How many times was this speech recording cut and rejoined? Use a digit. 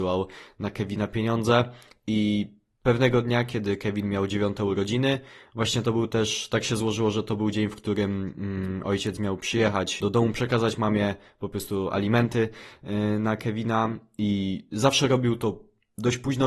1